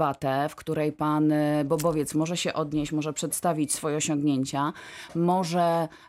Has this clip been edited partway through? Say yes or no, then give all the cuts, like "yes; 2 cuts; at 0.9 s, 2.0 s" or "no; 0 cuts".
no; 0 cuts